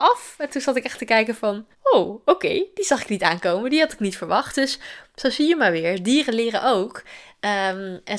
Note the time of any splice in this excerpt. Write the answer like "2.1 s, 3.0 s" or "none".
1.7 s